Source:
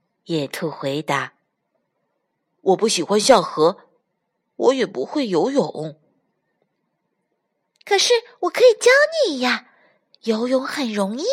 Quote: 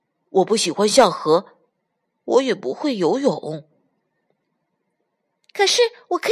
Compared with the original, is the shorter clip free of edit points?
yes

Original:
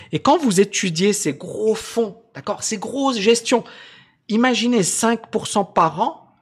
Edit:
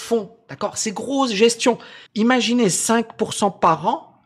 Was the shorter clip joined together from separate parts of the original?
yes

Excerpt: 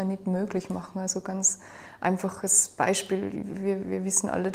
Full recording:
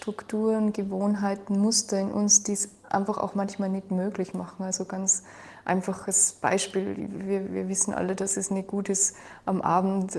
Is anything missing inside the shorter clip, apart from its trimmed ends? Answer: no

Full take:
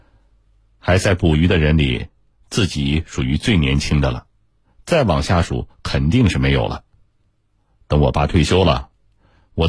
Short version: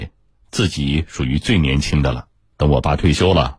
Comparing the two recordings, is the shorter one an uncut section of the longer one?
no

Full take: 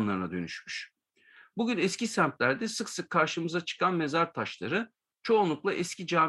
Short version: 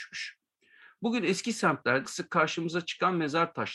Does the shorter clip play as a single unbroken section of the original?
no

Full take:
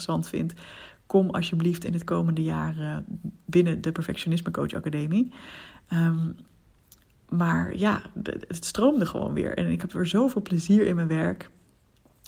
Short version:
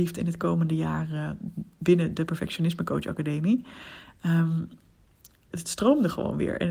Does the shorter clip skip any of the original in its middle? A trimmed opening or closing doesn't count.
yes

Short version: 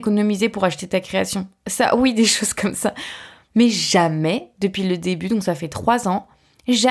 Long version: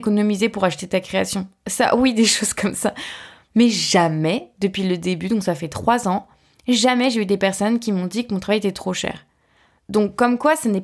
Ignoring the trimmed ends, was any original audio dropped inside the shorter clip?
no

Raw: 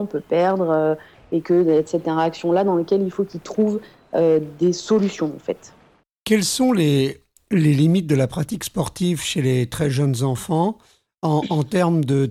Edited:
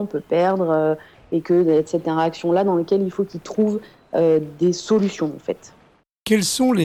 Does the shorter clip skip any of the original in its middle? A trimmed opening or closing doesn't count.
no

